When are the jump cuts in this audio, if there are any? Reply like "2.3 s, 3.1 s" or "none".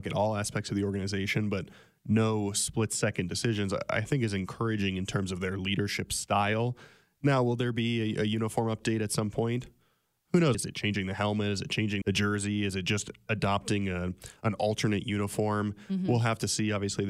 10.5 s, 12.0 s